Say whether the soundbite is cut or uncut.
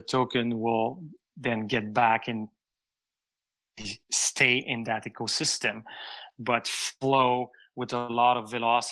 cut